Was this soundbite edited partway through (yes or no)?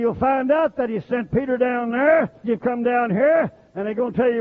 yes